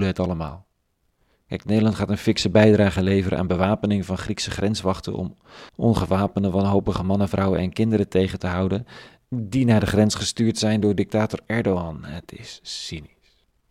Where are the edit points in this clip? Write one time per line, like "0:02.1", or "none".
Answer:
0:05.7

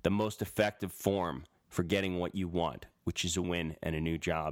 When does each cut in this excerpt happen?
0:03.4

